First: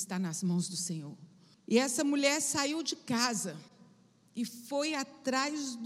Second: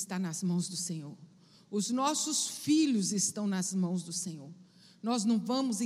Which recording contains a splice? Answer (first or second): first